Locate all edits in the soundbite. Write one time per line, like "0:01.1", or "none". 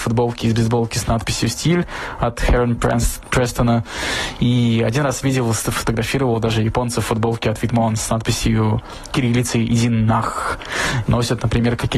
0:11.1